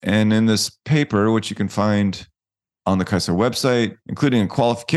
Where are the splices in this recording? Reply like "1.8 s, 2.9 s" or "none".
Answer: 4.0 s